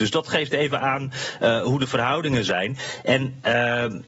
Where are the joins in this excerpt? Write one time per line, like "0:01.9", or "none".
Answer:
none

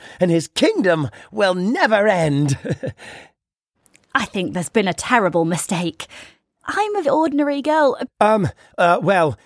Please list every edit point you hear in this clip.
0:07.0
0:08.1

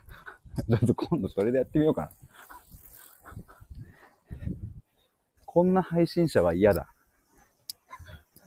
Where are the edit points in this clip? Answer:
0:05.4

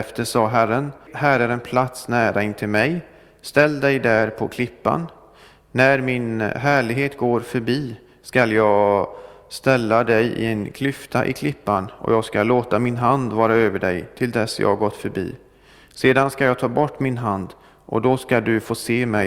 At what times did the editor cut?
0:01.1

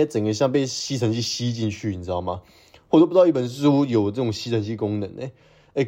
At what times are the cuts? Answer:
none

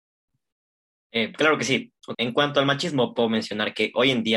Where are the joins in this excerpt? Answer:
0:02.1

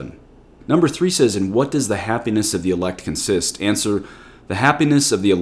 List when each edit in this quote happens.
none

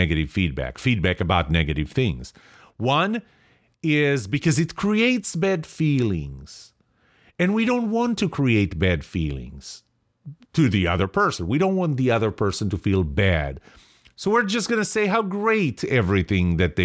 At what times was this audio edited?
none

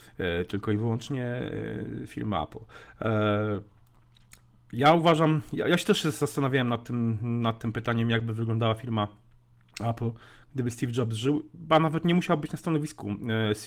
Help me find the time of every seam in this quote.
none

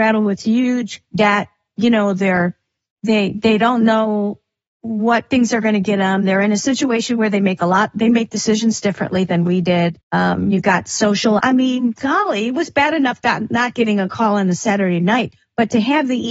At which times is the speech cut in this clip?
0:10.0
0:11.4

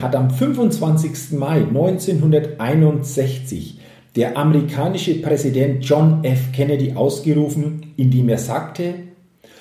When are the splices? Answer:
none

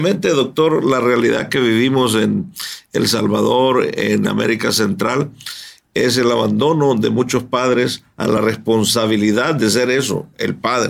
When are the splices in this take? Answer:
none

